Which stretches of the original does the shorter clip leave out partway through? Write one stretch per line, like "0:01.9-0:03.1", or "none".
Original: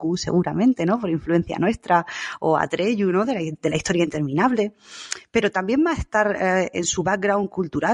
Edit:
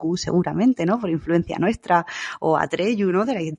none